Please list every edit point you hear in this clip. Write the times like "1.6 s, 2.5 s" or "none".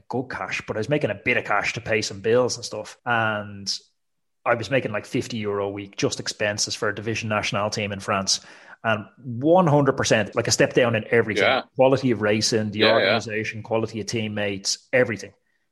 3.0 s, 10.3 s